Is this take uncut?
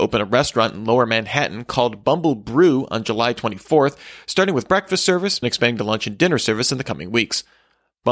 no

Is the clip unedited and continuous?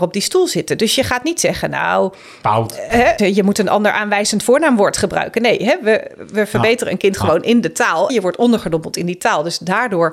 no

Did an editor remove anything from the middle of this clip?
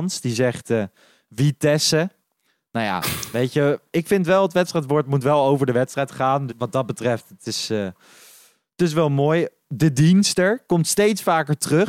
yes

